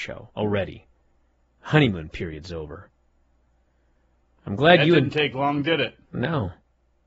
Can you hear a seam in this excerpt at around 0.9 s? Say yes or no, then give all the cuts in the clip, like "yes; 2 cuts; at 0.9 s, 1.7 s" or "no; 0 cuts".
no; 0 cuts